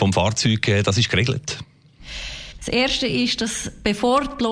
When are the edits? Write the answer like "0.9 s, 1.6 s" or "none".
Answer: 2.6 s